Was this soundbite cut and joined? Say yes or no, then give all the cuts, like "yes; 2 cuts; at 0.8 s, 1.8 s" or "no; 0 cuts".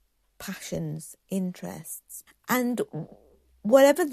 yes; 1 cut; at 2.3 s